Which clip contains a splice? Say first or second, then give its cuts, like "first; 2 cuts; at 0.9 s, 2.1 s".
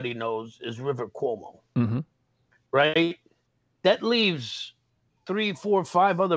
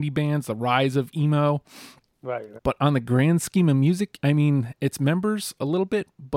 second; 2 cuts; at 2.6 s, 4.2 s